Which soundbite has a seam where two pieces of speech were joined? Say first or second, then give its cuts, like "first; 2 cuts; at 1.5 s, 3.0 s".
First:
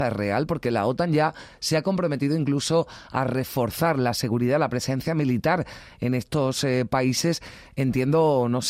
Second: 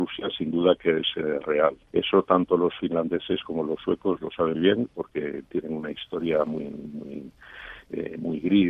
second; 2 cuts; at 1.9 s, 4.5 s